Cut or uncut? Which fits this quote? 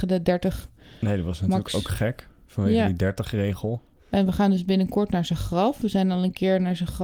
uncut